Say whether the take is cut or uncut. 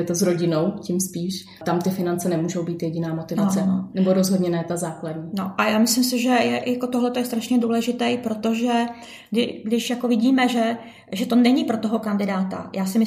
uncut